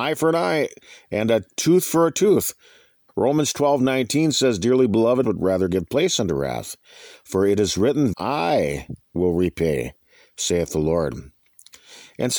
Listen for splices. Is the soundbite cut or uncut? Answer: cut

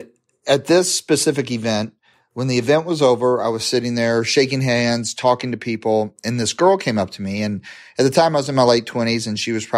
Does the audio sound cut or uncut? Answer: uncut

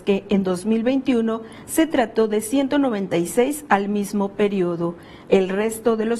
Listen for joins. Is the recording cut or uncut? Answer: cut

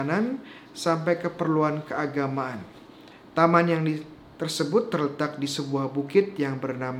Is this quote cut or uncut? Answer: cut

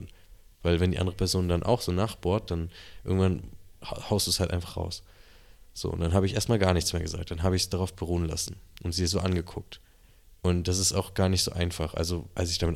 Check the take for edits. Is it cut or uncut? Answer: uncut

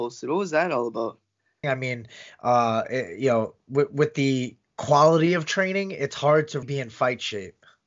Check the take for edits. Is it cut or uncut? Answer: cut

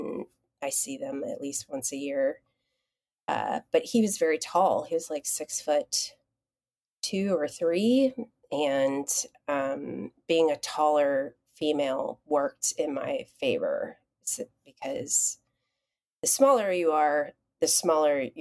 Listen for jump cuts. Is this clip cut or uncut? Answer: uncut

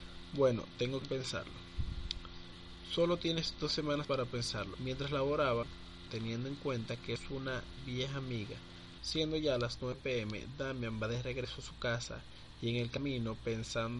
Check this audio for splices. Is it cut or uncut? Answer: cut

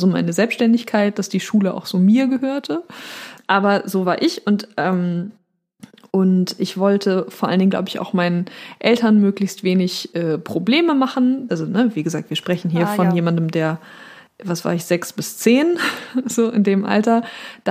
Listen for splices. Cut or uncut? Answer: cut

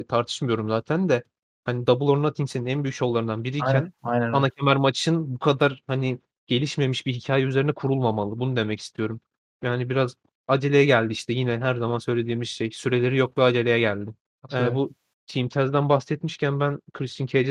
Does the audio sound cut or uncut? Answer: uncut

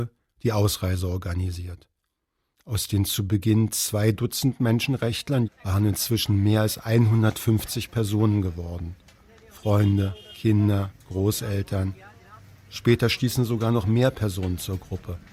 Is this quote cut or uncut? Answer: cut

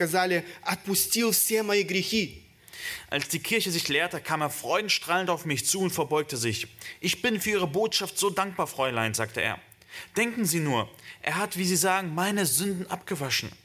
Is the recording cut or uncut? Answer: uncut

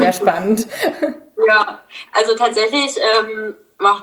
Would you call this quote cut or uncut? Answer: uncut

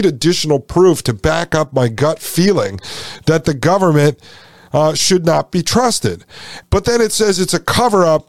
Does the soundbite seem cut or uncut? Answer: cut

